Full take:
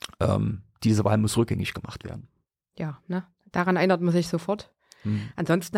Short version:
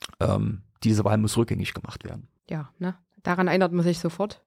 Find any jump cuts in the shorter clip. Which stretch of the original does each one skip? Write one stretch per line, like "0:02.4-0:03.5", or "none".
0:02.4-0:02.7